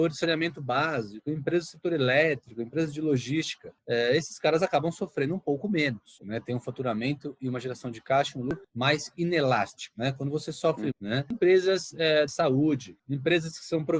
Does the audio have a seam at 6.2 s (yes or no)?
yes